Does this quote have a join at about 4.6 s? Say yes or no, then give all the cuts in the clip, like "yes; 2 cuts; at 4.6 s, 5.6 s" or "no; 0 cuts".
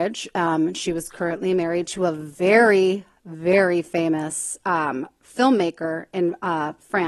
no; 0 cuts